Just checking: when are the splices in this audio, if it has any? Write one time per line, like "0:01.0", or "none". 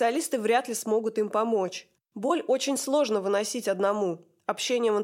none